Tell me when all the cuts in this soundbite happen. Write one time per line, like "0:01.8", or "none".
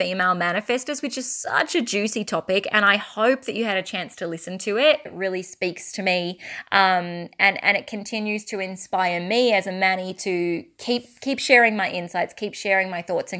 0:05.1